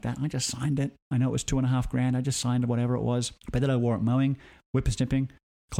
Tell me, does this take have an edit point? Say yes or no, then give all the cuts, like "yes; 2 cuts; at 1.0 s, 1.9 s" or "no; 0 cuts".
yes; 1 cut; at 3.4 s